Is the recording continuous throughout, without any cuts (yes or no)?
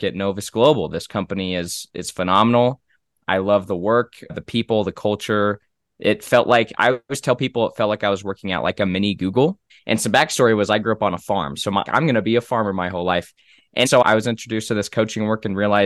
no